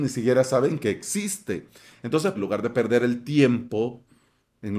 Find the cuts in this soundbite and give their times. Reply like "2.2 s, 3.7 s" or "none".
2.3 s